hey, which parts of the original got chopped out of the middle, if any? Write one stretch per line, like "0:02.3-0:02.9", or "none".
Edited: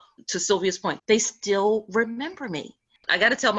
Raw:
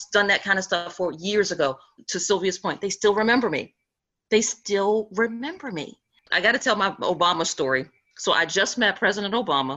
0:02.8-0:04.2